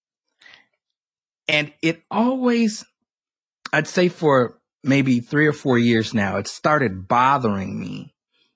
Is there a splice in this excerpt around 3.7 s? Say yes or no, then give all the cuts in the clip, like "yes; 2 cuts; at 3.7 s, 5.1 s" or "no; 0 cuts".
no; 0 cuts